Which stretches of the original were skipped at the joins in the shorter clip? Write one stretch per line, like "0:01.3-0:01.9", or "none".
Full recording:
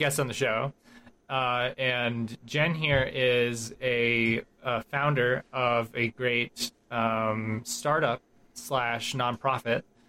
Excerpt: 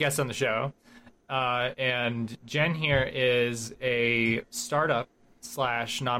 0:04.5-0:07.6